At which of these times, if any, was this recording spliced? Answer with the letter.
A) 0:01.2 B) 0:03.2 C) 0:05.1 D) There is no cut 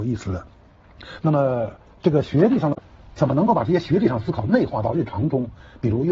A